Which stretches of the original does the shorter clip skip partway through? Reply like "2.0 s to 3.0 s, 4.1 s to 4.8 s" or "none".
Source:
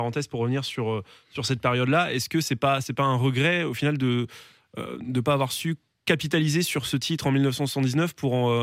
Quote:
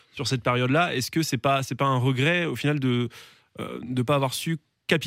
none